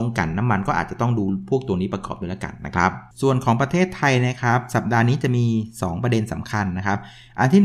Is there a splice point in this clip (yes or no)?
yes